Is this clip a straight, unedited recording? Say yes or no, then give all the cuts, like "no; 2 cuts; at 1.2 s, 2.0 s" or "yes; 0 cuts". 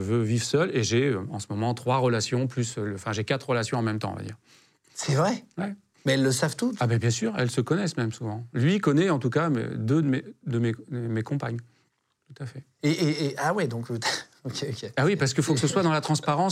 yes; 0 cuts